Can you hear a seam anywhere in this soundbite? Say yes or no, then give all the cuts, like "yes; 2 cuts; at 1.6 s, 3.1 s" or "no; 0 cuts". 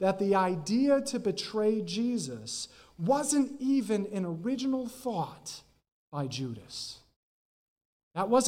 no; 0 cuts